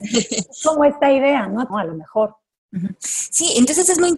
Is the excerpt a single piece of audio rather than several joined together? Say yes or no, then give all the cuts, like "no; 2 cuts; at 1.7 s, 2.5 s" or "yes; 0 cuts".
no; 1 cut; at 1.7 s